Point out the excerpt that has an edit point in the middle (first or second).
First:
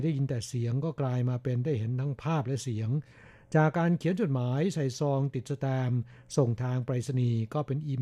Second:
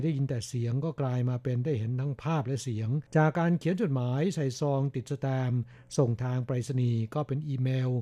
second